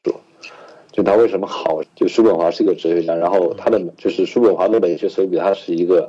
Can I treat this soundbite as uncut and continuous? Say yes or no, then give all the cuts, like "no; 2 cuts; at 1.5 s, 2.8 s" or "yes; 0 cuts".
no; 1 cut; at 1.8 s